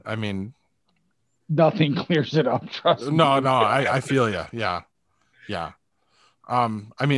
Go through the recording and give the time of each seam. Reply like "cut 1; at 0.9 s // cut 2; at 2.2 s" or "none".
none